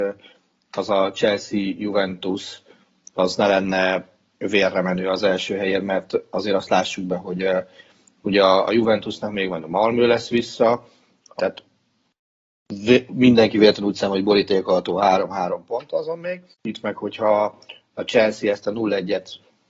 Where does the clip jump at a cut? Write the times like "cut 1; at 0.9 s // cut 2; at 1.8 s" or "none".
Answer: cut 1; at 11.4 s // cut 2; at 16.5 s